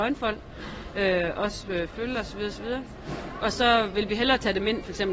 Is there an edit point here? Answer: no; 0 cuts

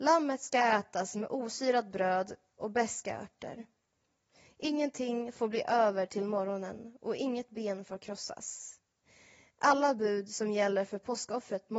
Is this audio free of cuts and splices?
yes; 0 cuts

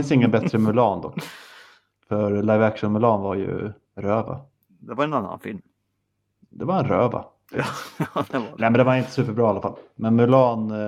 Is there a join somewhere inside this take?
no; 0 cuts

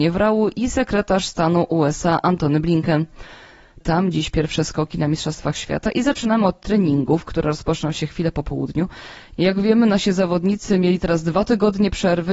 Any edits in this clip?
yes; 1 cut; at 3.8 s

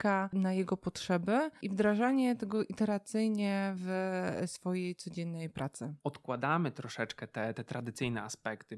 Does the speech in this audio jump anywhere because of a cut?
yes; 1 cut; at 6.0 s

